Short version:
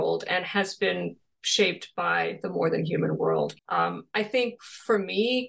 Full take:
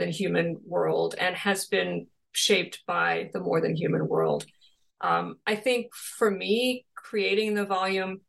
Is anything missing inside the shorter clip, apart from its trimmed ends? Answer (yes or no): yes